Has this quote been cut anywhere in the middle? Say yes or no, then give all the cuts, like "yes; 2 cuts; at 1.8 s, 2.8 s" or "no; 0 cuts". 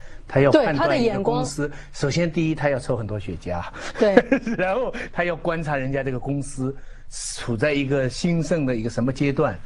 no; 0 cuts